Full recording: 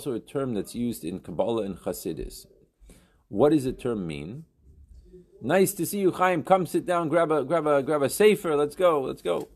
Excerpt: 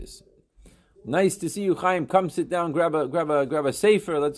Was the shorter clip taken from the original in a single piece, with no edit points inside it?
no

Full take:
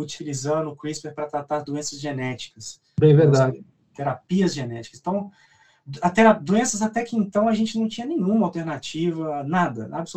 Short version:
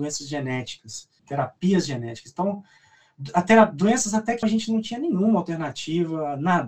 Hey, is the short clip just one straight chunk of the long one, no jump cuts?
no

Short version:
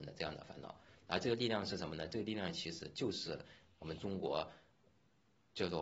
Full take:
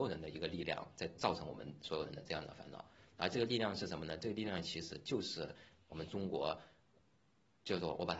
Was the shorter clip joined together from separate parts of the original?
no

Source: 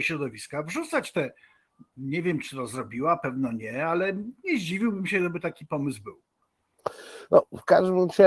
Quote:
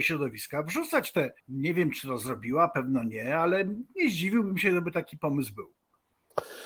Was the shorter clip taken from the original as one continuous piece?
no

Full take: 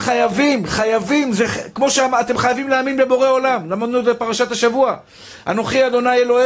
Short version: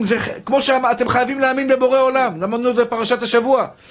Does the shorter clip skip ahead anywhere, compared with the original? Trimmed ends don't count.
no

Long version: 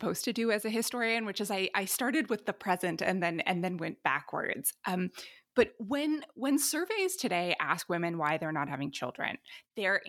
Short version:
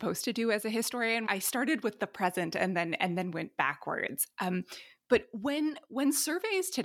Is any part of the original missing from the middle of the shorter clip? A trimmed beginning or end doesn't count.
yes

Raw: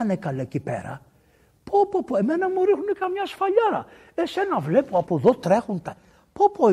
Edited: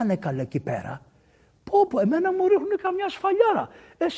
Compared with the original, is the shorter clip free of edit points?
no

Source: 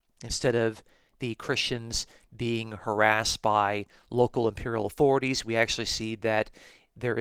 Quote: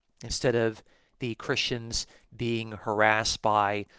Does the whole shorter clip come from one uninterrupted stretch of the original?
yes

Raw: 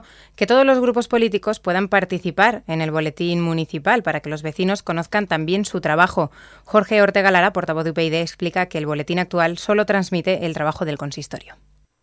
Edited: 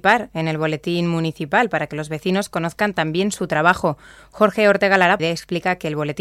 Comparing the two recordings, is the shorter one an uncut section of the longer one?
no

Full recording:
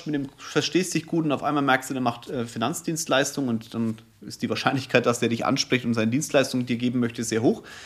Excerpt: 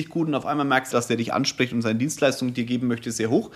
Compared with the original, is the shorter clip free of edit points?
no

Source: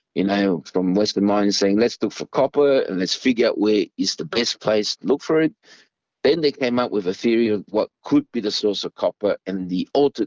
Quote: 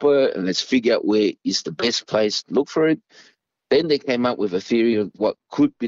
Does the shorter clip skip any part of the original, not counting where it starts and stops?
no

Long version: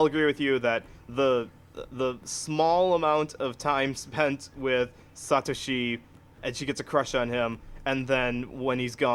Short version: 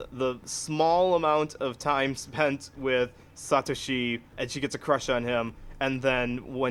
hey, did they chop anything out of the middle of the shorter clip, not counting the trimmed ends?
yes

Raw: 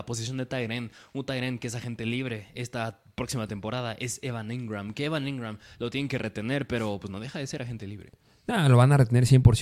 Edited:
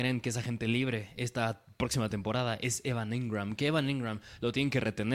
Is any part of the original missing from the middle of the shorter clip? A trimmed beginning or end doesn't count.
no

